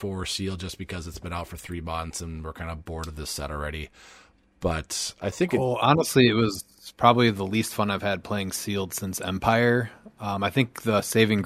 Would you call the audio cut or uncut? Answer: uncut